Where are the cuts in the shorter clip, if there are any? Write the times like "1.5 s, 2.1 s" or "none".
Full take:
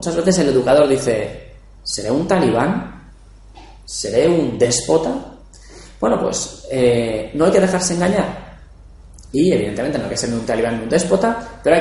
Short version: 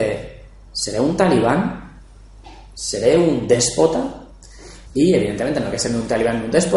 4.9 s